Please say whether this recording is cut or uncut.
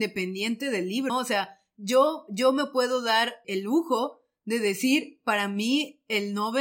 cut